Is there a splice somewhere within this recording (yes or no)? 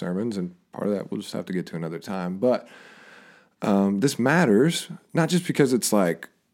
no